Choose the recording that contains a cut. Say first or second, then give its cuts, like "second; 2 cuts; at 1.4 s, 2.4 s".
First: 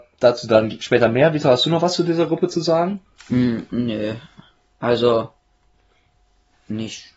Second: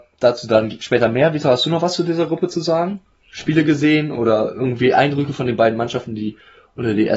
first; 1 cut; at 3.2 s